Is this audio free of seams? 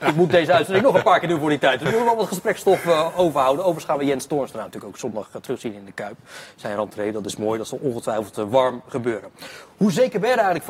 yes; 0 cuts

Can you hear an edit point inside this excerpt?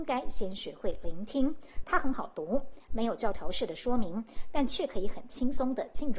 yes; 1 cut; at 1.8 s

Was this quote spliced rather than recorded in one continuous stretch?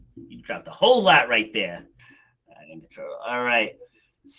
yes; 1 cut; at 2.0 s

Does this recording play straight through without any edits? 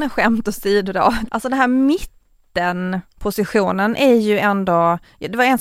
no; 1 cut; at 1.3 s

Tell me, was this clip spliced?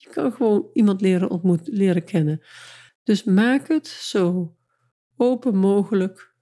yes; 1 cut; at 2.9 s

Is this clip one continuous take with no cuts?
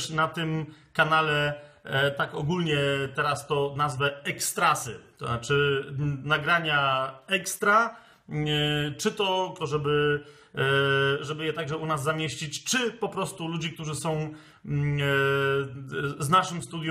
no; 1 cut; at 9.6 s

